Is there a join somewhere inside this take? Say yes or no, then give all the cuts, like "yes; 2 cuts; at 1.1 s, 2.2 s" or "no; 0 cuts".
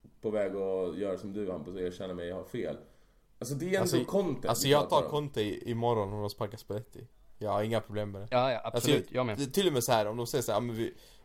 yes; 1 cut; at 3.3 s